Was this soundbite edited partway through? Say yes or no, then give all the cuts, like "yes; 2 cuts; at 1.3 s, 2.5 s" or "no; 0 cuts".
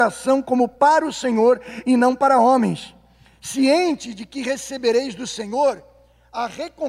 no; 0 cuts